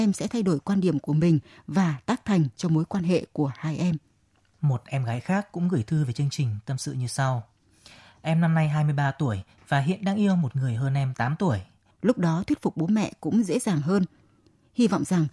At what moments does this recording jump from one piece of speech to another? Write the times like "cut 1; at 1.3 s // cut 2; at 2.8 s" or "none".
cut 1; at 11.9 s